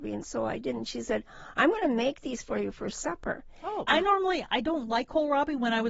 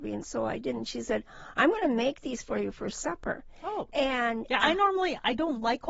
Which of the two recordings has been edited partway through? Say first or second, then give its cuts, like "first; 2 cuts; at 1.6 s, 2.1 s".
first; 1 cut; at 3.9 s